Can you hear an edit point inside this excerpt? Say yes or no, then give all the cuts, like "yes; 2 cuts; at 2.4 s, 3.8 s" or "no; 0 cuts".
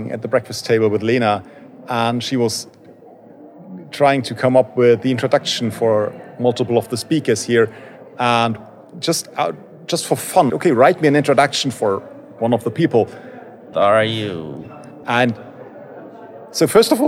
yes; 3 cuts; at 10.5 s, 13.7 s, 15.0 s